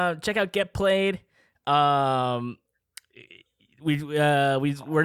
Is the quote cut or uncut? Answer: uncut